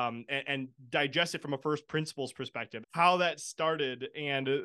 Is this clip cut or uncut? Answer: cut